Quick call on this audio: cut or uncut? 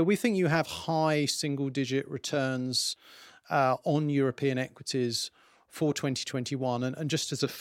uncut